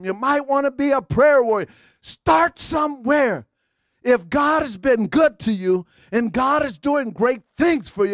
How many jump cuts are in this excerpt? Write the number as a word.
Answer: zero